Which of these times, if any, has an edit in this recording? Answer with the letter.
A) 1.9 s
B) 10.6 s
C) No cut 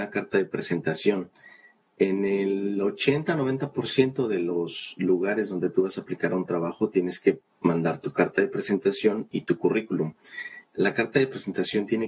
B